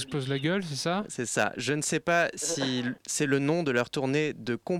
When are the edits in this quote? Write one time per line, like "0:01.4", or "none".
none